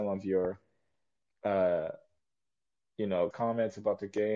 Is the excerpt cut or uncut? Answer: cut